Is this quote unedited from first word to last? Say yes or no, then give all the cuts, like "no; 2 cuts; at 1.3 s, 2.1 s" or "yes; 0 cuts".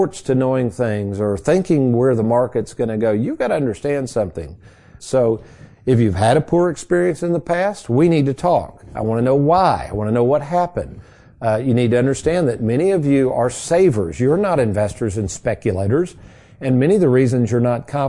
no; 1 cut; at 5.0 s